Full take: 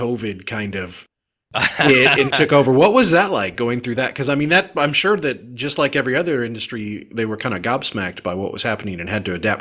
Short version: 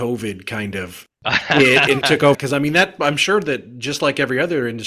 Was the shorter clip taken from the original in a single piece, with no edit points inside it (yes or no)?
no